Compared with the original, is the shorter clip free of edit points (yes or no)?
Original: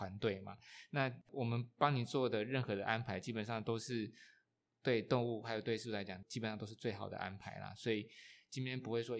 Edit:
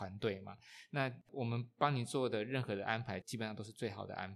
no